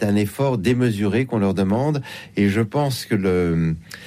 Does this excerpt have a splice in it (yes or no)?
no